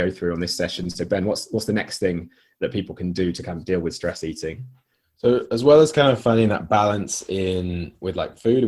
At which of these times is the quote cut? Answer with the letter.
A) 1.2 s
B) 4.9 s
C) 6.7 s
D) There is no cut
D